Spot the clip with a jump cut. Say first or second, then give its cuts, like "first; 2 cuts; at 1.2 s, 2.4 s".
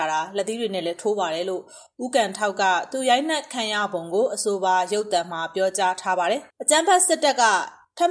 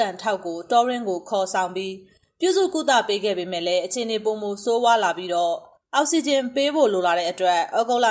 first; 1 cut; at 6.5 s